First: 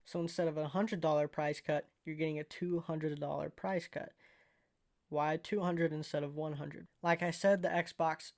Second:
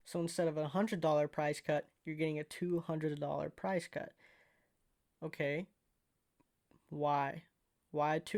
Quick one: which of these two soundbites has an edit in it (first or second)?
first